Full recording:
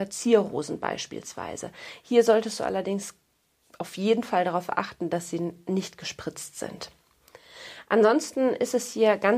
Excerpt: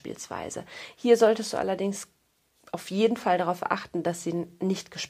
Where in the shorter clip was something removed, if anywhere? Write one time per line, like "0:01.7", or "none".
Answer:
none